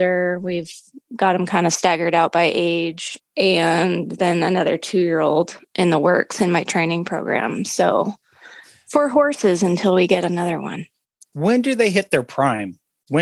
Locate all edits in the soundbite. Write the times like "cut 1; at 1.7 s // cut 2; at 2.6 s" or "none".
cut 1; at 3.2 s